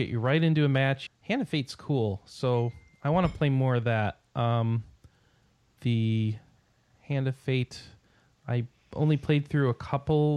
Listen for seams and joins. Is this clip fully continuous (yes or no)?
no